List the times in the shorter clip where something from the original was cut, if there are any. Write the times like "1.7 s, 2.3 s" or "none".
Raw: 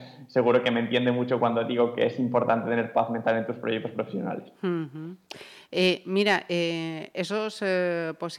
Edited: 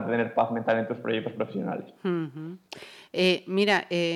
none